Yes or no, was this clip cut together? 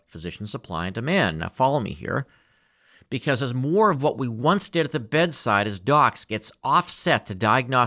no